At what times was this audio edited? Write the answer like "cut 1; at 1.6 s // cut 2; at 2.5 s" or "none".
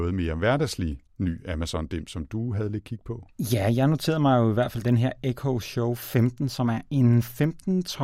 none